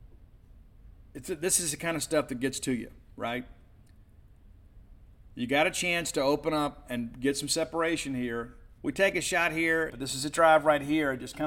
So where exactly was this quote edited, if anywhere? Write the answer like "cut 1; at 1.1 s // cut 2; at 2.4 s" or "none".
cut 1; at 8.8 s // cut 2; at 9.9 s